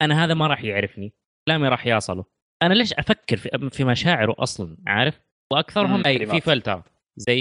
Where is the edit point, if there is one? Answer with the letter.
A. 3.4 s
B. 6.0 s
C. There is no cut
B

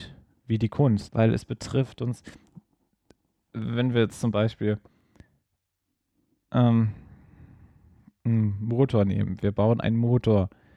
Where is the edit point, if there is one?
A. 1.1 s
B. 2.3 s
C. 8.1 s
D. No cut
A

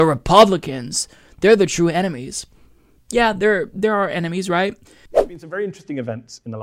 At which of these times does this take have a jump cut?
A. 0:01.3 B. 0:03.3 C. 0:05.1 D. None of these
C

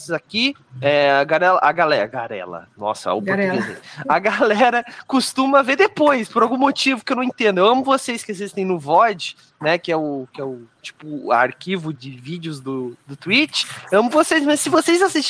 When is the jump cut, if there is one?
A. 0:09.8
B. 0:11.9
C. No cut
B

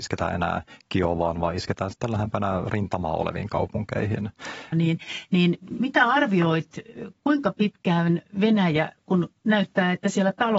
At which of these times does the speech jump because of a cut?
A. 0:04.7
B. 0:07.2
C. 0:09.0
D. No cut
A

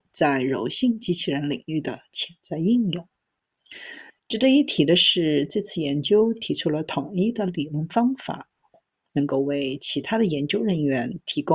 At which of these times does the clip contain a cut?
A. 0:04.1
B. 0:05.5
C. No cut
A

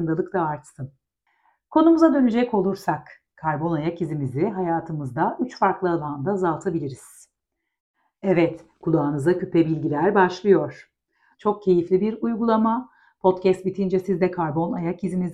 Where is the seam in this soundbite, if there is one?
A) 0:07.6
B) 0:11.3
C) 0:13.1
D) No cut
B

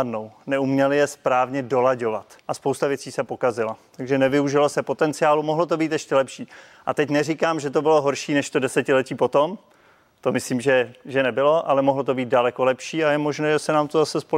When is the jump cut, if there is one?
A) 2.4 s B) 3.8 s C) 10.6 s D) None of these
A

